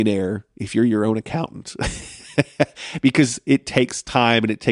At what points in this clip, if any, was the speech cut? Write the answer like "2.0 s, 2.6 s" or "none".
none